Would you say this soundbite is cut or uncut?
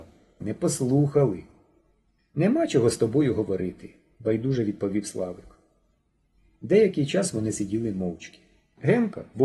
uncut